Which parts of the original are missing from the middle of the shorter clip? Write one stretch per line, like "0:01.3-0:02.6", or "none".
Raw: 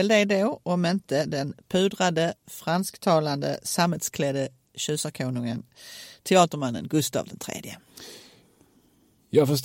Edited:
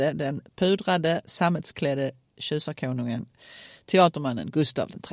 0:02.4-0:03.6